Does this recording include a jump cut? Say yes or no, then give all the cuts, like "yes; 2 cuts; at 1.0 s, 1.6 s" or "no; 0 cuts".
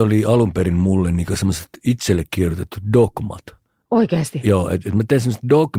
no; 0 cuts